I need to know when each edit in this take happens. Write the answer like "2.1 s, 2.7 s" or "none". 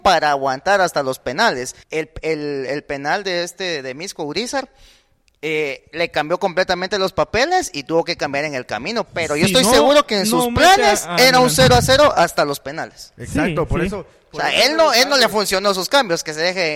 1.8 s